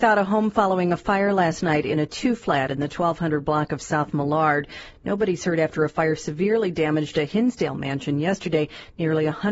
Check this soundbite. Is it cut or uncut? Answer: uncut